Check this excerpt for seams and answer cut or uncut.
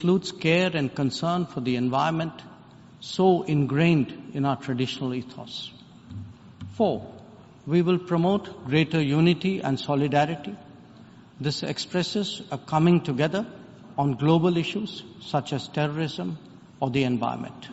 cut